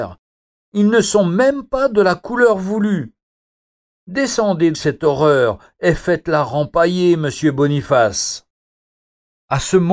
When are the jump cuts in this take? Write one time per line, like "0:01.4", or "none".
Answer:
0:04.7